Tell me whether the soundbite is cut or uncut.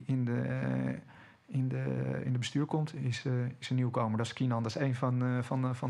uncut